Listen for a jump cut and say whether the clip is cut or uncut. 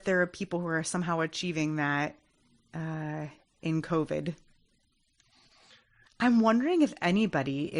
cut